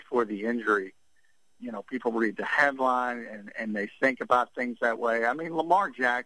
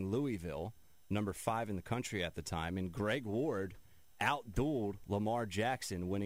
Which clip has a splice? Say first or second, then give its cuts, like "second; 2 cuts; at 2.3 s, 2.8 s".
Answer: first; 1 cut; at 1.6 s